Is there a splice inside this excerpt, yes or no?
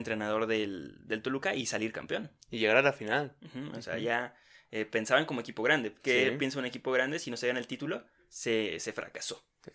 no